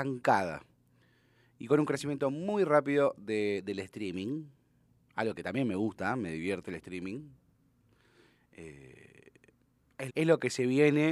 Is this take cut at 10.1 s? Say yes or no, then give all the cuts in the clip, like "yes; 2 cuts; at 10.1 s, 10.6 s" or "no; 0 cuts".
yes; 1 cut; at 10.1 s